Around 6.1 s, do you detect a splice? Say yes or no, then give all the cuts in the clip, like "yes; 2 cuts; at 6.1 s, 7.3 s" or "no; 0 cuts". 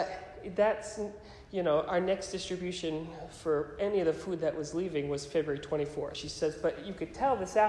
yes; 1 cut; at 6.1 s